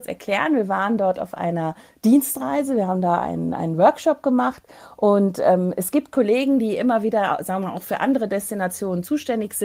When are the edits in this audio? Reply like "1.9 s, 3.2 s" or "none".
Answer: none